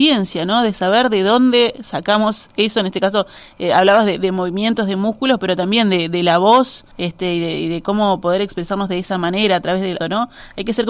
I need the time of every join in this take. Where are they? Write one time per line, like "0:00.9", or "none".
0:06.9
0:10.0